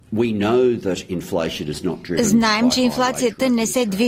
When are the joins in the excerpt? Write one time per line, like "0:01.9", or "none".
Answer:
none

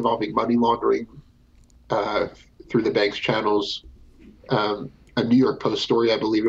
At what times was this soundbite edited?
none

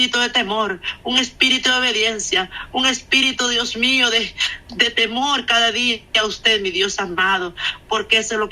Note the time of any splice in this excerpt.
none

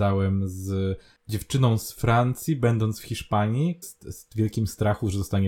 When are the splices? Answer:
0:03.8

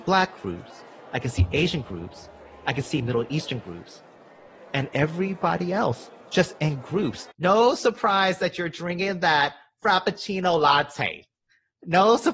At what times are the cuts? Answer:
0:07.3

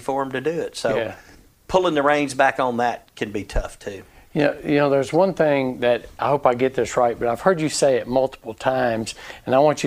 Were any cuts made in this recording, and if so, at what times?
0:06.2

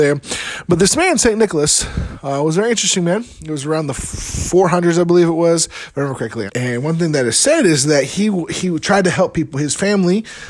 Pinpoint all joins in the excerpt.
0:06.5

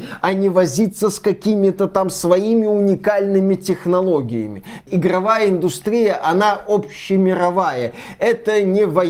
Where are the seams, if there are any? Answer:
0:04.8

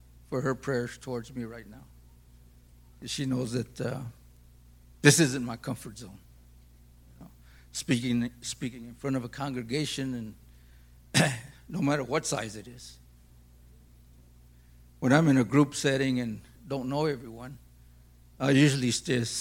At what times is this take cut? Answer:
0:16.5

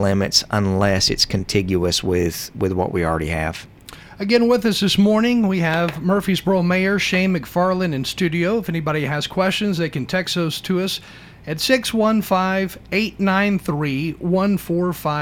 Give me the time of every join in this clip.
none

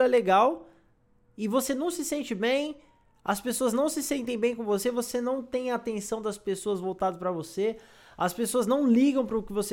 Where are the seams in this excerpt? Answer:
none

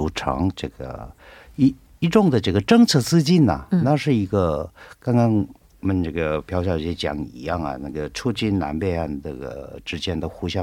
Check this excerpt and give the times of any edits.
none

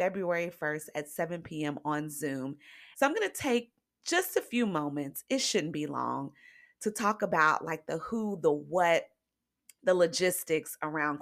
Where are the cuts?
0:02.9

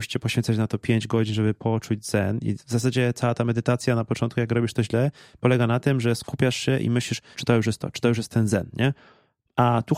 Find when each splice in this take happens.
0:07.3

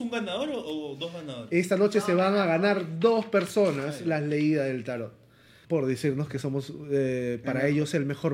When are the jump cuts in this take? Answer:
0:05.6

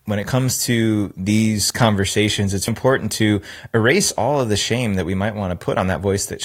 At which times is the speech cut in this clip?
0:02.7

